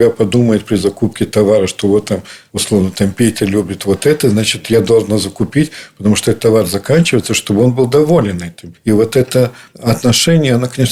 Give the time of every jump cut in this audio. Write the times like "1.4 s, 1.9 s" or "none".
none